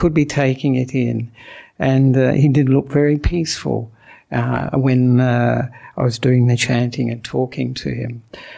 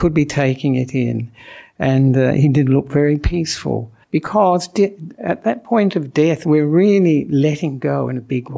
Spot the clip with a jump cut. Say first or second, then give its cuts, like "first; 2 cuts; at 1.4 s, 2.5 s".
second; 1 cut; at 4.0 s